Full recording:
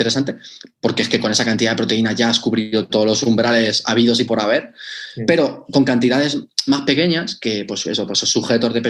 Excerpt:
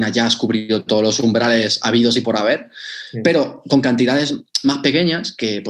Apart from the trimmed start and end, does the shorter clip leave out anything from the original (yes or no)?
no